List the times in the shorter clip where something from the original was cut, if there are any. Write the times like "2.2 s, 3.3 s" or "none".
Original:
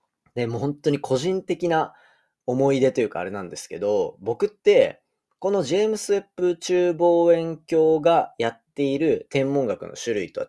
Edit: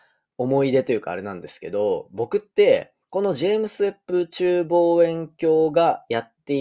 3.0 s